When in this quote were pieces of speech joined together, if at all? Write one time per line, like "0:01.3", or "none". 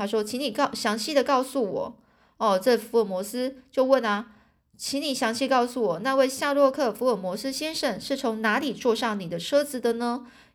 none

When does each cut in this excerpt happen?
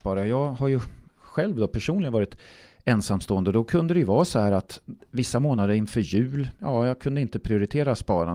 none

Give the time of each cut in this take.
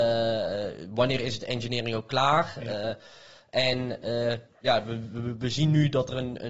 none

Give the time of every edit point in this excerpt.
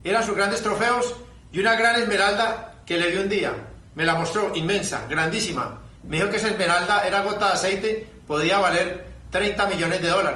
0:06.0

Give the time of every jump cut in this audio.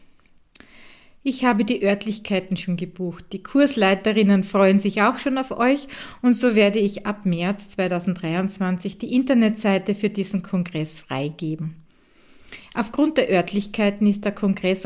none

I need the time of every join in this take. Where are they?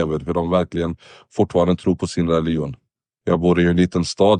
0:03.2

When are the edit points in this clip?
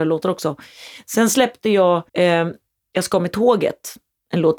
0:02.1

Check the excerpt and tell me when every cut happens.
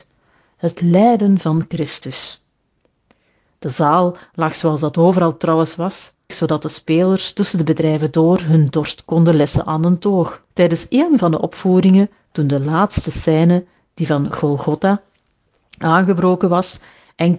0:06.3
0:10.5

